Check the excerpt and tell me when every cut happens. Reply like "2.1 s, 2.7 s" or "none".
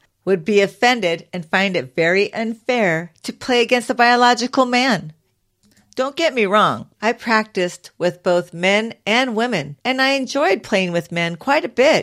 6.9 s, 9.8 s